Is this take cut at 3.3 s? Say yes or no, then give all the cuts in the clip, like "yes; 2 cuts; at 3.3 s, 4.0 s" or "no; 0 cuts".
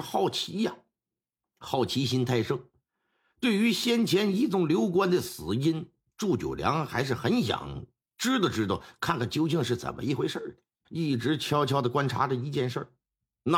no; 1 cut; at 10.8 s